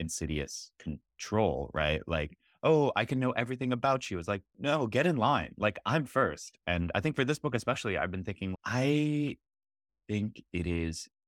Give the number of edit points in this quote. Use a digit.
2